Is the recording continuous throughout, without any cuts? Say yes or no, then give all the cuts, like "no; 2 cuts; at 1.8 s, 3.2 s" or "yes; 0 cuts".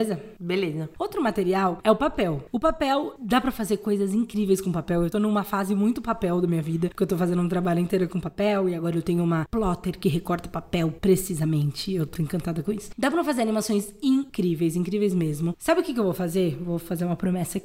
no; 1 cut; at 12.1 s